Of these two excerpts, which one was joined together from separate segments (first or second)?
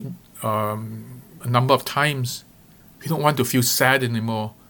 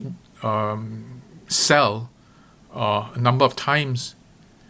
first